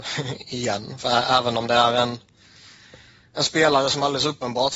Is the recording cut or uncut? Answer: uncut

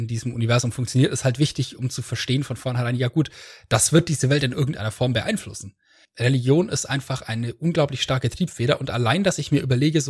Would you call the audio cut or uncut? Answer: uncut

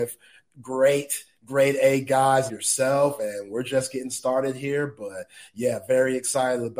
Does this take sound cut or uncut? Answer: cut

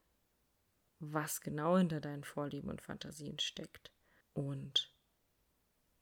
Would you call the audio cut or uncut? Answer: cut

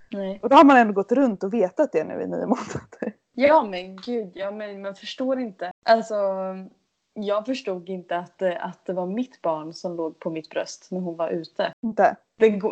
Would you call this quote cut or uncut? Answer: uncut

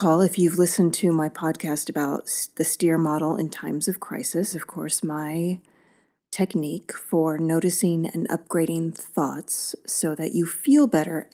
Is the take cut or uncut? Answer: cut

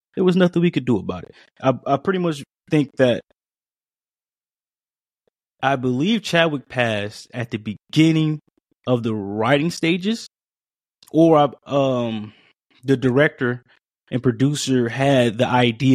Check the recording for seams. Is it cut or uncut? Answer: uncut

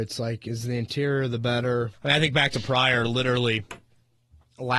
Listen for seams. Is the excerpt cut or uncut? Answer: cut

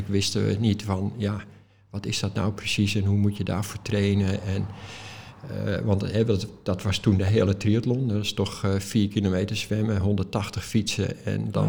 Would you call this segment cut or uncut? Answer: uncut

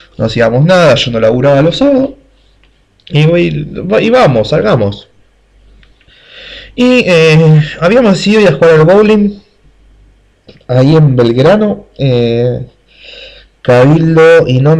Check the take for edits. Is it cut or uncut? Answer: uncut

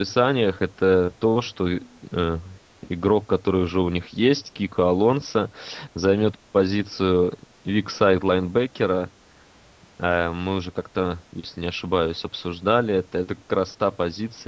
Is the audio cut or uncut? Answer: uncut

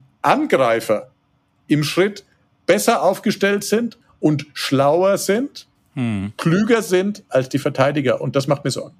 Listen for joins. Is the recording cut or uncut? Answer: uncut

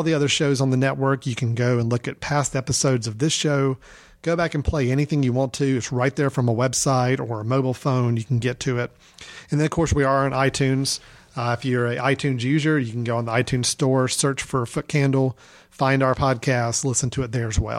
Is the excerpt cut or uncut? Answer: uncut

